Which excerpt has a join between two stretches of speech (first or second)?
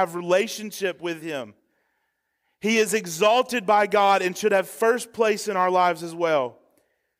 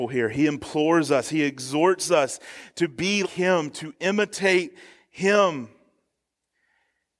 second